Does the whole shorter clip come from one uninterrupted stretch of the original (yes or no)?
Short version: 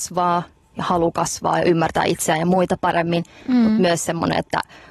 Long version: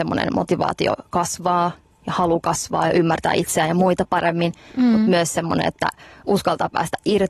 yes